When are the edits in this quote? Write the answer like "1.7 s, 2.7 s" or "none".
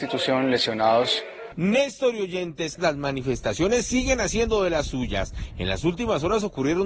2.8 s